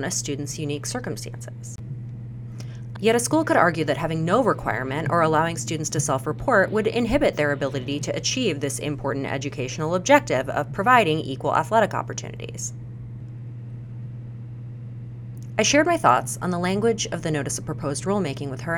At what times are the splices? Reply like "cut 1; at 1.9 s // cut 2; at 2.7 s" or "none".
cut 1; at 2.9 s // cut 2; at 15.6 s